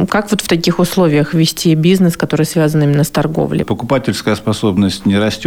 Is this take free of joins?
no; 1 cut; at 3.6 s

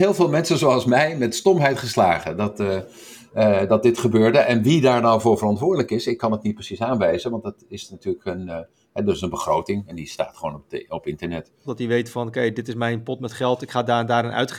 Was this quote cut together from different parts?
yes; 1 cut; at 11.6 s

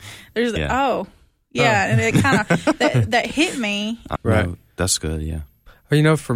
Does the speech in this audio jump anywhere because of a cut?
yes; 1 cut; at 4.2 s

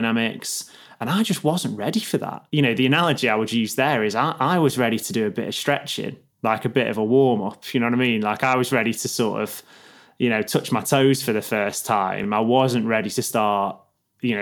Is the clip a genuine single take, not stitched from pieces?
yes; 0 cuts

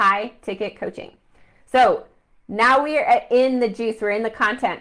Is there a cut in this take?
no; 0 cuts

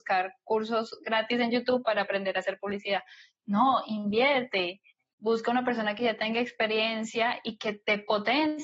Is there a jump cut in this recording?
no; 0 cuts

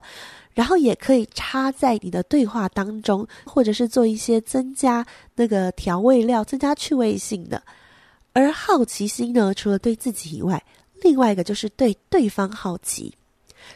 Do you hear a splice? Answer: yes; 1 cut; at 3.5 s

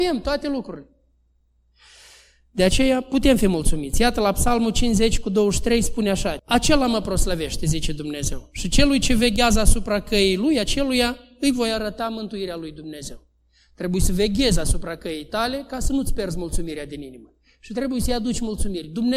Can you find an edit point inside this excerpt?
yes; 1 cut; at 6.4 s

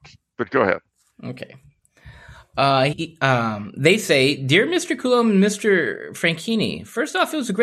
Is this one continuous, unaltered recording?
no; 1 cut; at 2.9 s

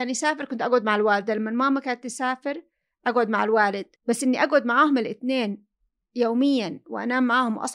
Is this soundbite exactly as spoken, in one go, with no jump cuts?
no; 1 cut; at 4.0 s

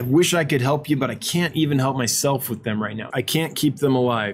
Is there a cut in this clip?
yes; 1 cut; at 3.1 s

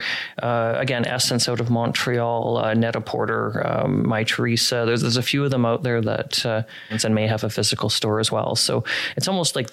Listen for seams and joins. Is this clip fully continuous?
yes; 0 cuts

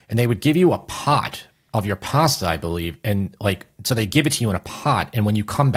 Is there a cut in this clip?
no; 0 cuts

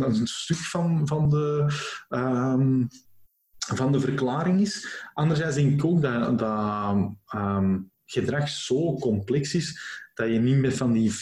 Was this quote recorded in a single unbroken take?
yes; 0 cuts

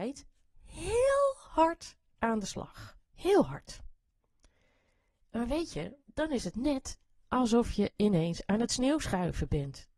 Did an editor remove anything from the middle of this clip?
yes; 2 cuts; at 3.0 s, 6.0 s

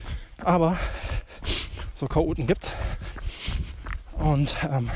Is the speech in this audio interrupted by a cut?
no; 0 cuts

